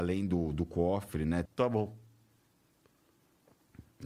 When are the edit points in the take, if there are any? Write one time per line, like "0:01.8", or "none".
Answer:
0:01.5